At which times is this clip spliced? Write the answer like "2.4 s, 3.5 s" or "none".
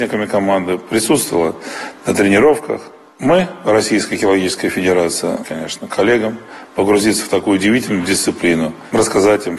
5.4 s